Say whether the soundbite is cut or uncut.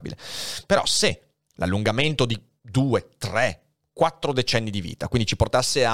uncut